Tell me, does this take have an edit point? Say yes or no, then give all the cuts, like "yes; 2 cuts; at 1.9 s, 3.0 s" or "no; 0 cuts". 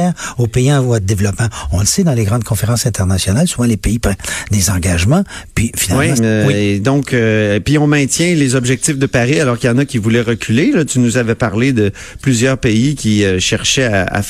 yes; 1 cut; at 6.2 s